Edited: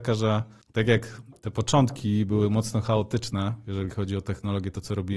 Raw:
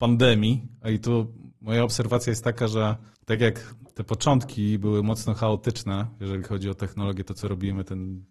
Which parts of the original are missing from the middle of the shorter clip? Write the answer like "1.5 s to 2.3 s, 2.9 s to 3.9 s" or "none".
none